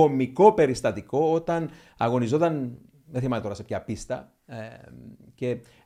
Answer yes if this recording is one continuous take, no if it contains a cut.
yes